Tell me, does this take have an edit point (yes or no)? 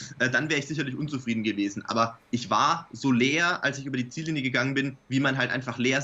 no